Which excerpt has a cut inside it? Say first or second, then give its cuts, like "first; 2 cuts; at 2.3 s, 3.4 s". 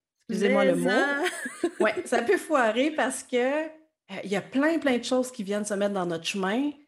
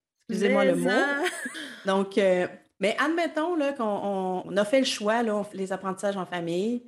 second; 3 cuts; at 1.5 s, 4.4 s, 5.5 s